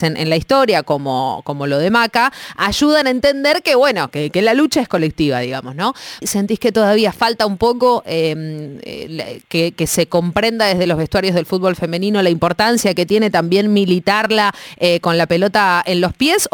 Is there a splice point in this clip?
yes; 1 cut; at 6.2 s

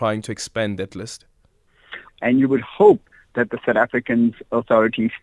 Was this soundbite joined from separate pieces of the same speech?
yes; 1 cut; at 2.1 s

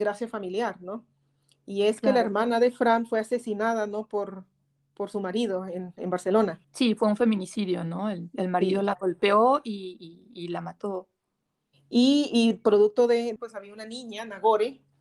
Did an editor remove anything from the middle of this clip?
yes; 2 cuts; at 6.6 s, 13.4 s

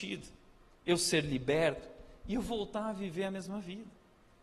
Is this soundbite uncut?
yes; 0 cuts

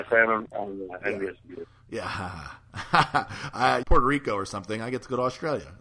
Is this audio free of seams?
no; 1 cut; at 3.8 s

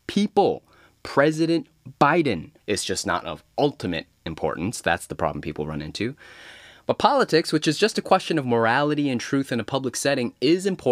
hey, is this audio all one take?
no; 1 cut; at 2.6 s

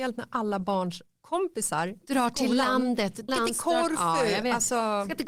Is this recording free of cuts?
no; 1 cut; at 3.3 s

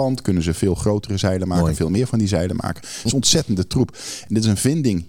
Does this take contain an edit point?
yes; 1 cut; at 2.8 s

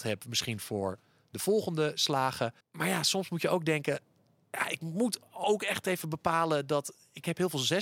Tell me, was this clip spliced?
yes; 1 cut; at 2.6 s

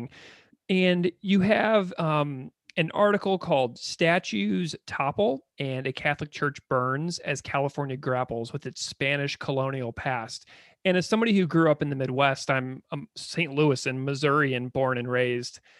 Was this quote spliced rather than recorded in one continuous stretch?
no; 0 cuts

